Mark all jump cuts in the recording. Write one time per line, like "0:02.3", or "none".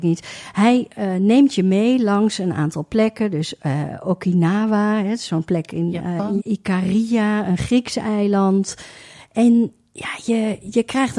0:06.4